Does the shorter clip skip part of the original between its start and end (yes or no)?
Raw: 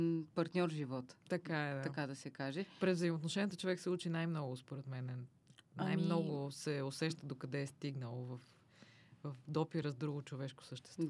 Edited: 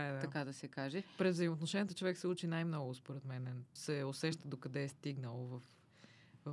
yes